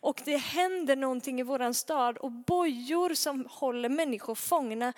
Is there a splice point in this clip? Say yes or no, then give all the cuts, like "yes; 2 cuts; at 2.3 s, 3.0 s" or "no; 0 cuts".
no; 0 cuts